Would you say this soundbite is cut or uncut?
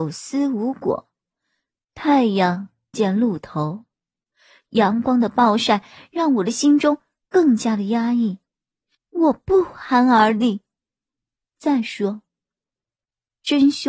cut